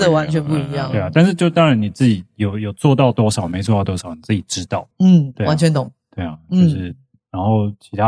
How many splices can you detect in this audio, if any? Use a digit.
1